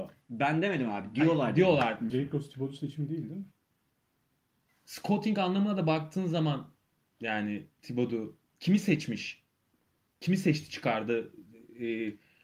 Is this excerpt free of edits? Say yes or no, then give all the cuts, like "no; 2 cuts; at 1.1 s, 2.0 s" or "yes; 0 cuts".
no; 2 cuts; at 2.1 s, 4.7 s